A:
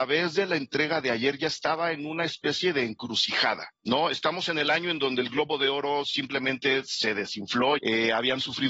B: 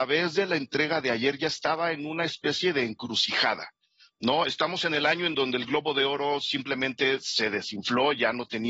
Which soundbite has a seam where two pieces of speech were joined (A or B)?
A